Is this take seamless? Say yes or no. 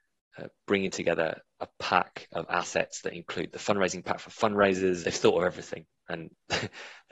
no